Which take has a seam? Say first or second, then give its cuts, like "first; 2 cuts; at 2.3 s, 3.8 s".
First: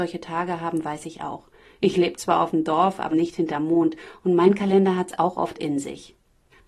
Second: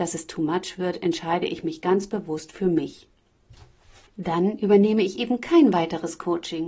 first; 1 cut; at 3.1 s